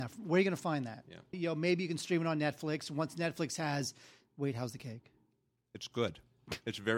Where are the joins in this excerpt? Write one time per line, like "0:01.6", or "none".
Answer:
0:01.3